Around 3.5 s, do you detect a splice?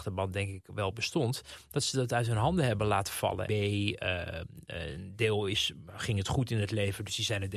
yes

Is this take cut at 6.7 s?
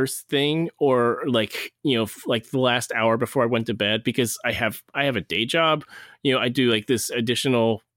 no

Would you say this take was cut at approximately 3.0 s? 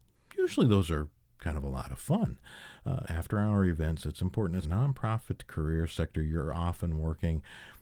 yes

